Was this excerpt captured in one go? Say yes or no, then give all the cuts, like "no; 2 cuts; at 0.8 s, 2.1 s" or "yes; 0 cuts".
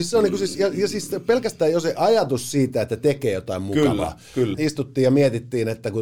no; 1 cut; at 4.5 s